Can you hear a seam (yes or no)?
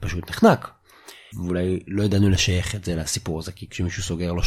yes